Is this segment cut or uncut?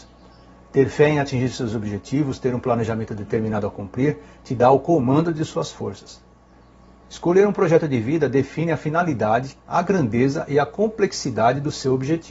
cut